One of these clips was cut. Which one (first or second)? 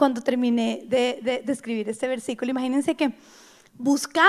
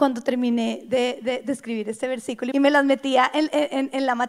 second